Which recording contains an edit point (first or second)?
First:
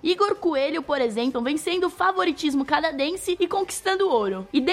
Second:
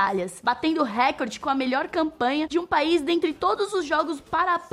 first